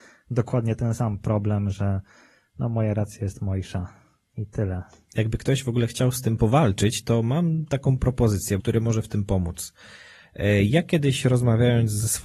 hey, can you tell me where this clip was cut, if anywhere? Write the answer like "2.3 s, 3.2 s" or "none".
8.6 s